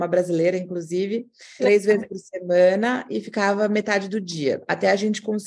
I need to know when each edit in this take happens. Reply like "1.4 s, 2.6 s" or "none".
1.6 s